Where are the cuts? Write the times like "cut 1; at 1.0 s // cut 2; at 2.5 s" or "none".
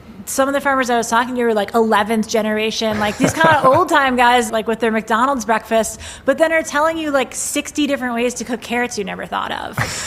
cut 1; at 4.5 s